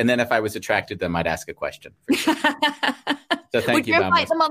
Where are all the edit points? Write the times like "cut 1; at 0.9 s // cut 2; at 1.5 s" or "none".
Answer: none